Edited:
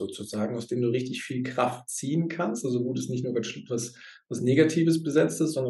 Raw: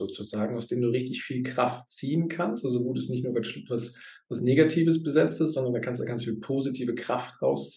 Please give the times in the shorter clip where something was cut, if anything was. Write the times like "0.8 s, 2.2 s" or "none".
none